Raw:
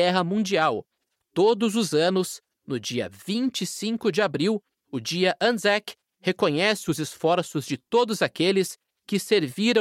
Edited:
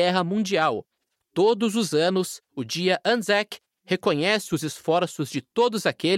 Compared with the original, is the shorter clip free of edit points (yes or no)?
no